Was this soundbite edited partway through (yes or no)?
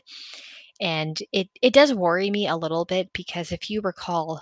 no